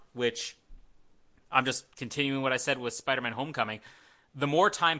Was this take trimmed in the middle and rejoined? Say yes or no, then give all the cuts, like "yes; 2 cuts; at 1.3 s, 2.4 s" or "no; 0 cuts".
yes; 1 cut; at 1.9 s